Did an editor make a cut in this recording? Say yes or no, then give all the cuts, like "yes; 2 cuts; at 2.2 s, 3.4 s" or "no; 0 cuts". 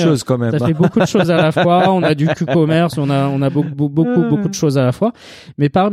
no; 0 cuts